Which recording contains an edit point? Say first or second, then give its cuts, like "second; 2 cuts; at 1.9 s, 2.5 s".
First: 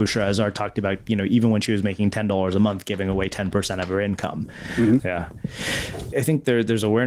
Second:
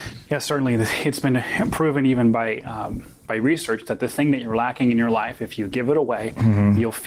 first; 2 cuts; at 5.0 s, 6.1 s